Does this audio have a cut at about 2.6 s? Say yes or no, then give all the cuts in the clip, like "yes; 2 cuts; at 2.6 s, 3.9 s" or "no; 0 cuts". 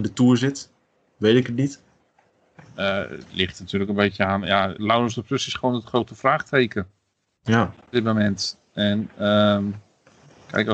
no; 1 cut; at 4.8 s